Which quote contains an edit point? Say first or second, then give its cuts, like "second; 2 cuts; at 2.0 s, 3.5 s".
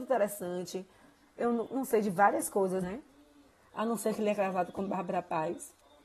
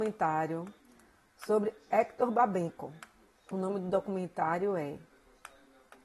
first; 1 cut; at 2.8 s